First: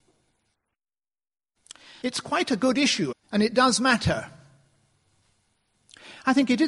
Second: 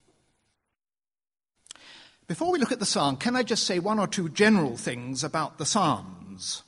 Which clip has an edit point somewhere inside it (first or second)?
first